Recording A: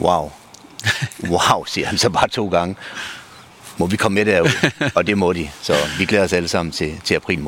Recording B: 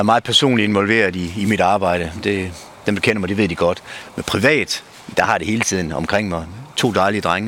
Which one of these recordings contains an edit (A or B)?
B